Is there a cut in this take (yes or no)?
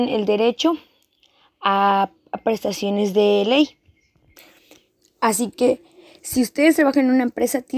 no